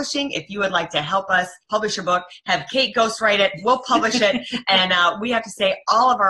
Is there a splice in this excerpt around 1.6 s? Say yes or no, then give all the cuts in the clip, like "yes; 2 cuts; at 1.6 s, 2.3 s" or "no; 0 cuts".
yes; 1 cut; at 1.6 s